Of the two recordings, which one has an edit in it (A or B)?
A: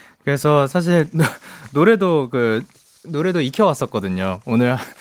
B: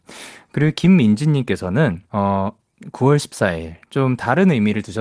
B